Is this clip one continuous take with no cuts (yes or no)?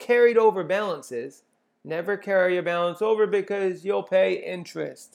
yes